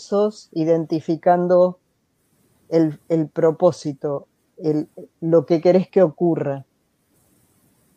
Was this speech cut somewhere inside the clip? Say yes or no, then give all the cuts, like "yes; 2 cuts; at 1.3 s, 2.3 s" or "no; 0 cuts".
no; 0 cuts